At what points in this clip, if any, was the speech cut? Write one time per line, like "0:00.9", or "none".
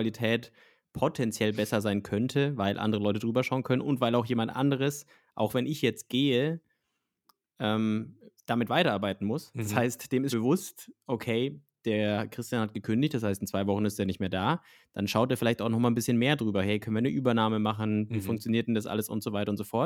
0:10.3